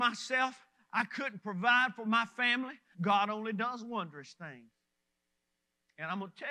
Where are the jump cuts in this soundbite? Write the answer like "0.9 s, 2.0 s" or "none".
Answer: 2.9 s

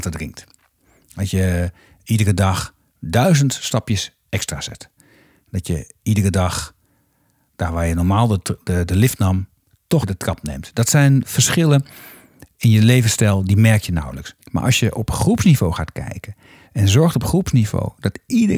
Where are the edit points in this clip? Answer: 10.0 s, 14.4 s

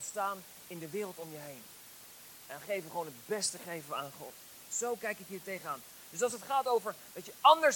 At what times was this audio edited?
2.5 s

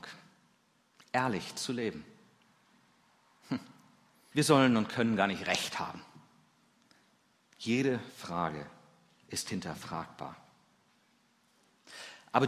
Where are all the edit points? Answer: 4.3 s

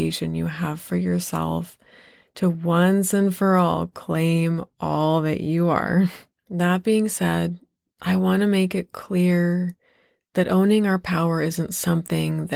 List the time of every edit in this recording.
6.3 s

